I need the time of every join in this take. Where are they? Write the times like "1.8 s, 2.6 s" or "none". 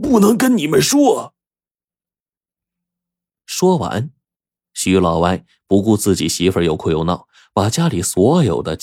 none